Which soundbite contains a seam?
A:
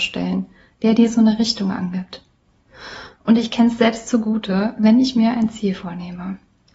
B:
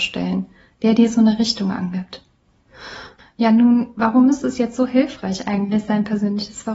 B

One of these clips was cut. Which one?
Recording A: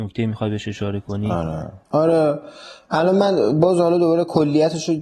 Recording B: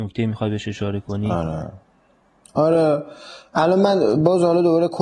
A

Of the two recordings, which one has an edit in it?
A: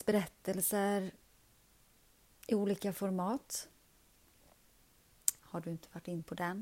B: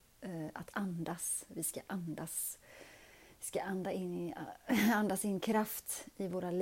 A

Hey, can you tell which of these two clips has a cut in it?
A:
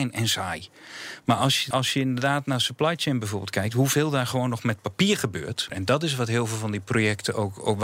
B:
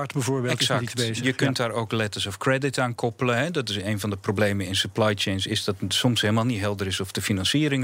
A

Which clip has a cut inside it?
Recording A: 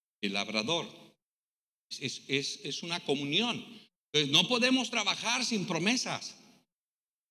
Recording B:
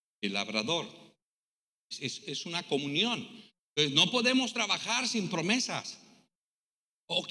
B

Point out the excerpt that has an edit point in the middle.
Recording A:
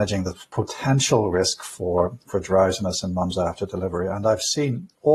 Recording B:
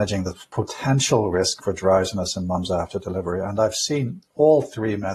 B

